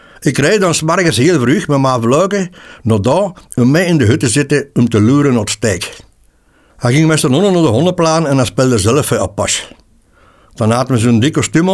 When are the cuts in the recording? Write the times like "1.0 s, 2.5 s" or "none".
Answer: 6.7 s